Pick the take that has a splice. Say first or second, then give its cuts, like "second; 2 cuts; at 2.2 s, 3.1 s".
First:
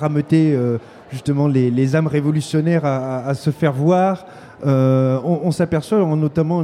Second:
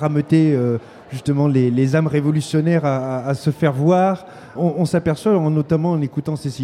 second; 1 cut; at 4.6 s